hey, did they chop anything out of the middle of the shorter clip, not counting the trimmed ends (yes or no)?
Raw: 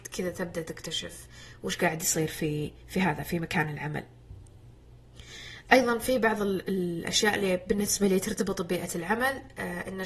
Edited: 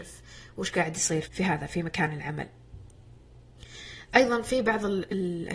yes